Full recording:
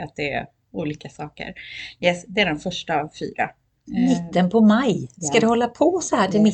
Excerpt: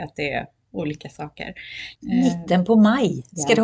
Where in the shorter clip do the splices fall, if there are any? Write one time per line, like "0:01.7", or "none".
0:01.9